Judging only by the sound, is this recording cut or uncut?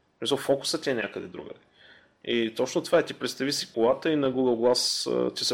cut